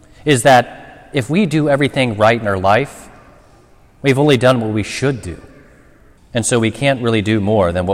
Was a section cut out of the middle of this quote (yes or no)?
yes